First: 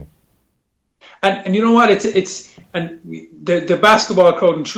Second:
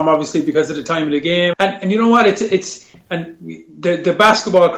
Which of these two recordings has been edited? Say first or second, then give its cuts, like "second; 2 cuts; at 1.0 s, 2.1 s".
second; 1 cut; at 1.5 s